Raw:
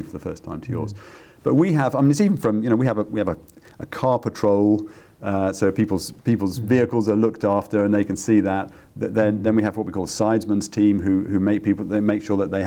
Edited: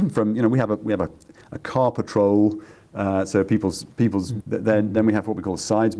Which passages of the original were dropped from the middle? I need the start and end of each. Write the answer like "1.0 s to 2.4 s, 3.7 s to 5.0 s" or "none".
6.7 s to 8.9 s